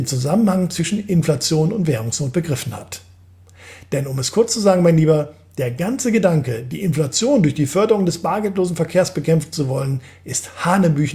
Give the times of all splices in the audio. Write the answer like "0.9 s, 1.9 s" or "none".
none